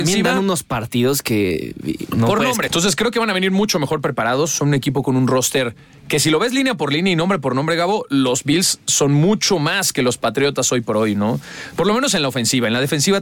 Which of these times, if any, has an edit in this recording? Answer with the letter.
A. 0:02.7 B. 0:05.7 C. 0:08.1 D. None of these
A